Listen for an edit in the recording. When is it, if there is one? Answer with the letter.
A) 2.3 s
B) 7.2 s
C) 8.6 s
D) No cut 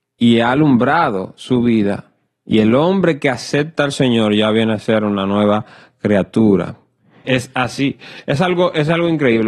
B